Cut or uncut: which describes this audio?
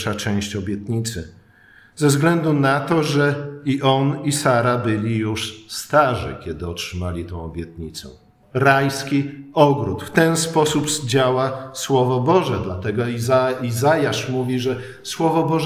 cut